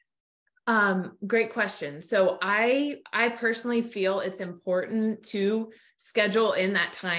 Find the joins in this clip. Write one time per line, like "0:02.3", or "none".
0:03.0